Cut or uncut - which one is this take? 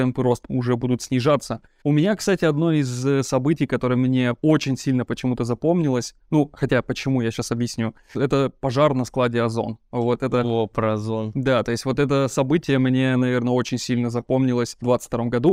cut